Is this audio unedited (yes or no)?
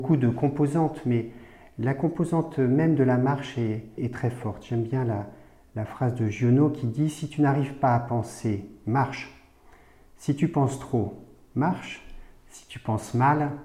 no